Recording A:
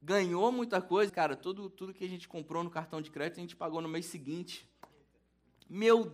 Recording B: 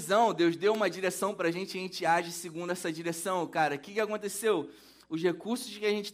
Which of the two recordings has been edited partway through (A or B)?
A